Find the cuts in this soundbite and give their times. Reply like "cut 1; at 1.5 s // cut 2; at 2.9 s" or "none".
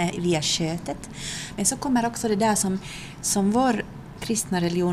none